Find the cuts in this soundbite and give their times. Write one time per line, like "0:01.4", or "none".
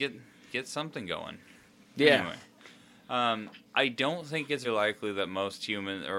0:04.6